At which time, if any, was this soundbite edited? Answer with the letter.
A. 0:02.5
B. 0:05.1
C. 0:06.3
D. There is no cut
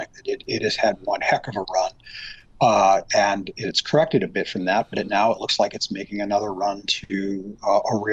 D